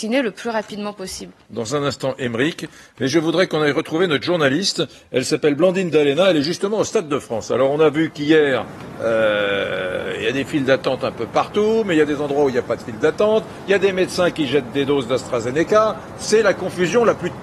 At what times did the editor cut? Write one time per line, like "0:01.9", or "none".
0:01.5